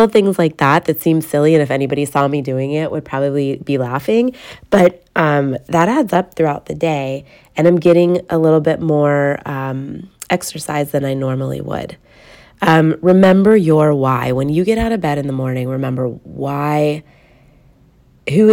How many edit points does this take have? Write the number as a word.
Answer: zero